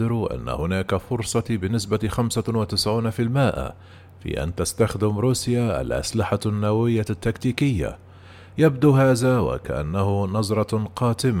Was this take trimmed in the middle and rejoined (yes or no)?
yes